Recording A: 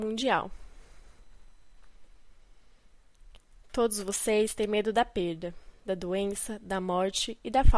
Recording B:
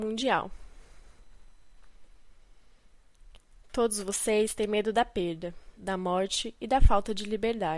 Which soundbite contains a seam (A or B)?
B